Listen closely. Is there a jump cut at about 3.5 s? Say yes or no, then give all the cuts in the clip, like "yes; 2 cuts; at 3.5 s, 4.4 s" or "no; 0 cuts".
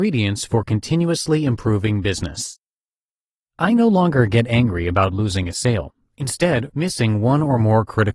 no; 1 cut; at 6.7 s